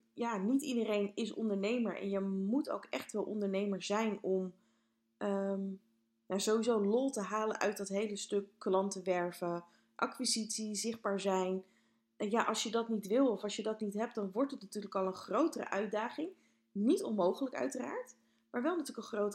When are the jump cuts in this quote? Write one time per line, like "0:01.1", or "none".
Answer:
none